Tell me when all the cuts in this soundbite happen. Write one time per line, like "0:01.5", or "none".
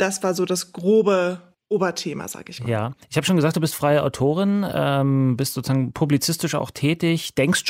none